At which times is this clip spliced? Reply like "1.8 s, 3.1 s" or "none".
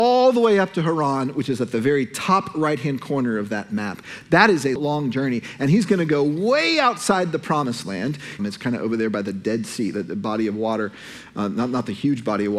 4.8 s, 8.4 s